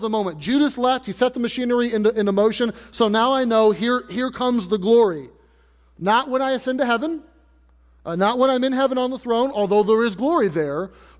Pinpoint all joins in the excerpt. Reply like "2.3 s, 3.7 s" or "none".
none